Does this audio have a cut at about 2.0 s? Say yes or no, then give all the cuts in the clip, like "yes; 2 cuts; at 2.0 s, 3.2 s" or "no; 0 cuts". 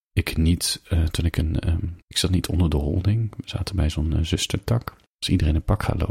yes; 2 cuts; at 2.0 s, 5.0 s